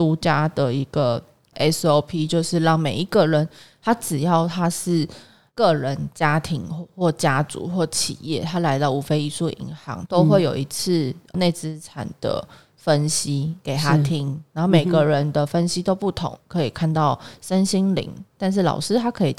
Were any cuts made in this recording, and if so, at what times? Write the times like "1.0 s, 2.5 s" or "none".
10.1 s, 16.4 s